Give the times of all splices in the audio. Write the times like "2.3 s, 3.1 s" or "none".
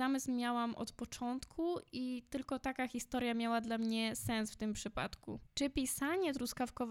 none